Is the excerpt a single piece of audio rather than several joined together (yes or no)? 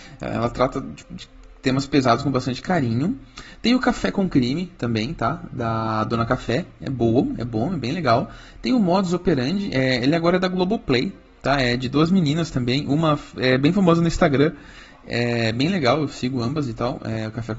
yes